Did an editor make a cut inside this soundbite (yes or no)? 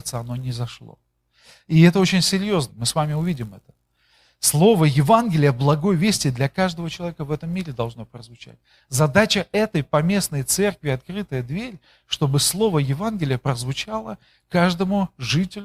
yes